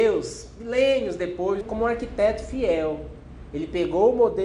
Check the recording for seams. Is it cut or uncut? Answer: cut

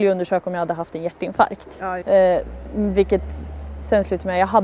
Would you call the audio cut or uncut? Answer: cut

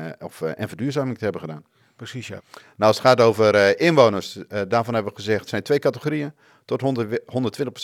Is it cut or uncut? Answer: cut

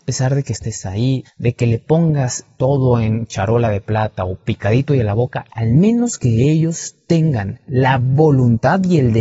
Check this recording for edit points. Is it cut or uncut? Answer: cut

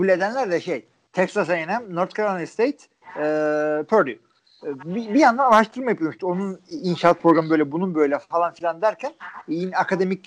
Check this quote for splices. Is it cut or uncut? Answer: uncut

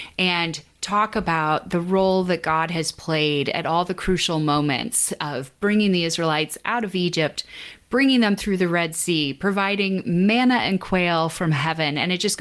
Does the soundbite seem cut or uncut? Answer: uncut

